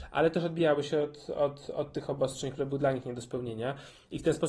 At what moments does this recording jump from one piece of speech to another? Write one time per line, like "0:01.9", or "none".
none